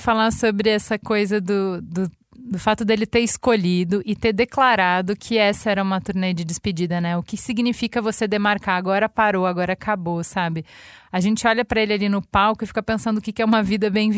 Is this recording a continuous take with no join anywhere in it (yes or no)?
yes